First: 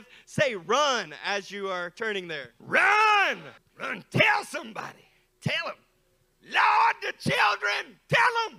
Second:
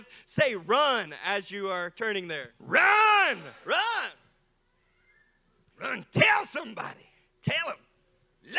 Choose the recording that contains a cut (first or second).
first